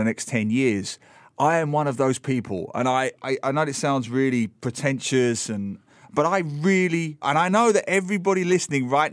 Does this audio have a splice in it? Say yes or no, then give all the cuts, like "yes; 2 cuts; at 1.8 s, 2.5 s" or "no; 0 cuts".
yes; 2 cuts; at 3.2 s, 7.2 s